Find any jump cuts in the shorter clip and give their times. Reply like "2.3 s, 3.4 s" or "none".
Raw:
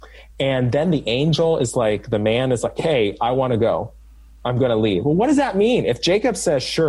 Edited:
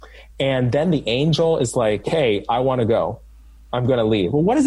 2.0 s